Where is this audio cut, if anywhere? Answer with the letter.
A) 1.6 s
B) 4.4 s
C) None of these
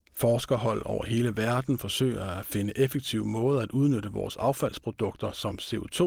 C